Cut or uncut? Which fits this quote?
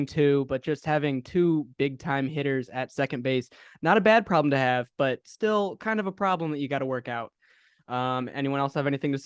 uncut